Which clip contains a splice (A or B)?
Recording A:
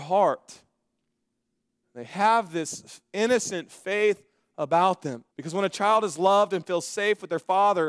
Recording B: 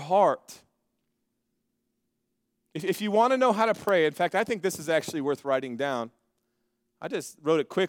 A